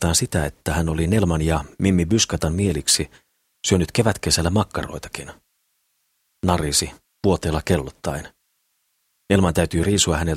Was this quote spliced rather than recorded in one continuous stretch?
no; 0 cuts

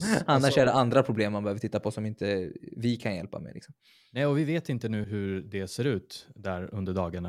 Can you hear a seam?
yes; 1 cut; at 5.0 s

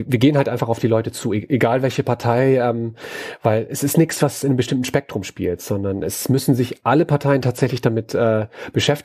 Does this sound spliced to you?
no; 0 cuts

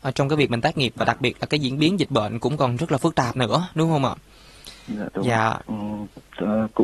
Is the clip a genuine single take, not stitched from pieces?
no; 1 cut; at 5.6 s

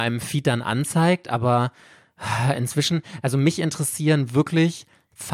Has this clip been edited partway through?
no; 0 cuts

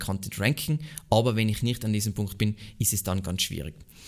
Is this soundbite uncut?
yes; 0 cuts

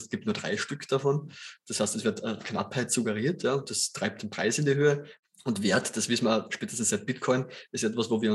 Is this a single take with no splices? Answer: yes; 0 cuts

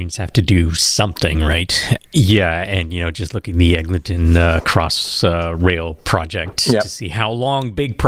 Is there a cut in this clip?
yes; 1 cut; at 2.0 s

